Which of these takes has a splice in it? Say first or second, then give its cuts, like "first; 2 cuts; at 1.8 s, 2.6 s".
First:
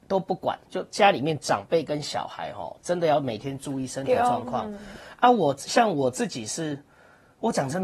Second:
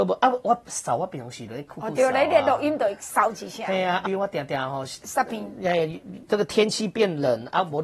second; 1 cut; at 4.1 s